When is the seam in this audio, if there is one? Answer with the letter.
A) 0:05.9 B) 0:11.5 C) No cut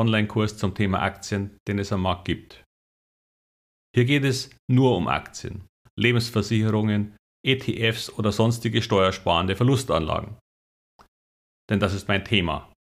A